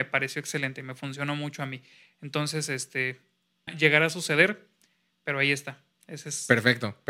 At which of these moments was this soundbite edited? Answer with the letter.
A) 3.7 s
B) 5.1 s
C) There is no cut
A